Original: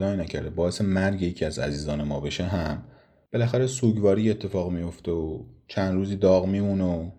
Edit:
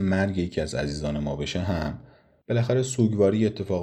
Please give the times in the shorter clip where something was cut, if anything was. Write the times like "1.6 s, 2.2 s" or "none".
none